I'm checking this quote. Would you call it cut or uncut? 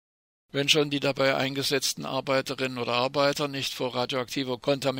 uncut